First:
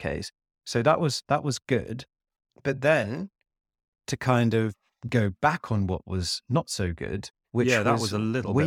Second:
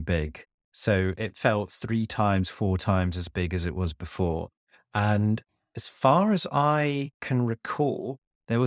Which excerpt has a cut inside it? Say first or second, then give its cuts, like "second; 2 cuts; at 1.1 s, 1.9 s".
first; 1 cut; at 7.4 s